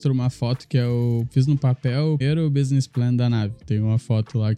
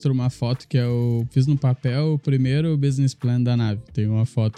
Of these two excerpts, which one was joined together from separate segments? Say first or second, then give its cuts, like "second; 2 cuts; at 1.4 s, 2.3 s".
first; 1 cut; at 2.2 s